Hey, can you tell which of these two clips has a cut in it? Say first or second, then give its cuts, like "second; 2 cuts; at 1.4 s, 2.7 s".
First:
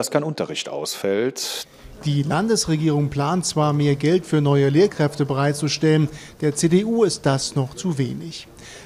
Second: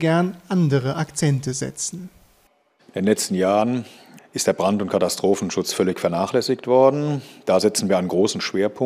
second; 1 cut; at 4.2 s